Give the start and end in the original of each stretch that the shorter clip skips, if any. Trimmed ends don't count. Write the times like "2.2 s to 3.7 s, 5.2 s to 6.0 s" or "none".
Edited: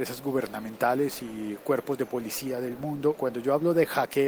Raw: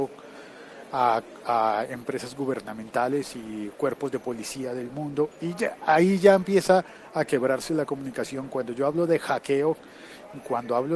5.3 s to 8.5 s